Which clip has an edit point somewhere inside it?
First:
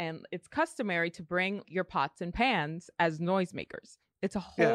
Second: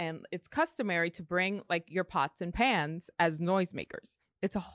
first; 1 cut; at 1.6 s

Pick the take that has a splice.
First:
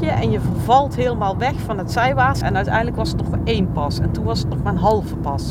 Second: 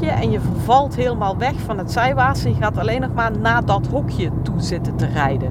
first; 1 cut; at 2.4 s

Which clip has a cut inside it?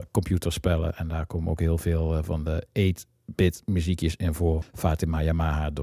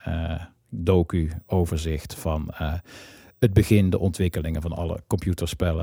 first; 1 cut; at 4.6 s

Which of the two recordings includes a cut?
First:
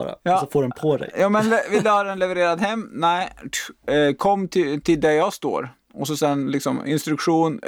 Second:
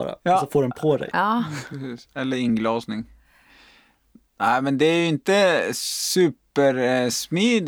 second; 1 cut; at 1.1 s

